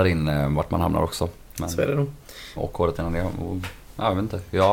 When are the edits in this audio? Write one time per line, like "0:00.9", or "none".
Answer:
0:02.6